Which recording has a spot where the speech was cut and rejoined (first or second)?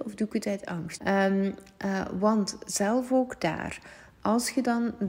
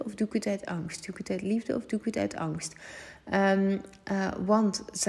first